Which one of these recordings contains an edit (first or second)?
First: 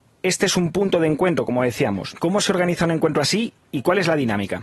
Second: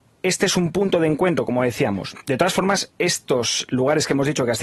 first